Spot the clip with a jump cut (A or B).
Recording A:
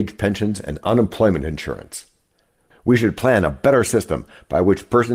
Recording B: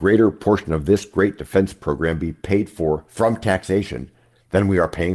A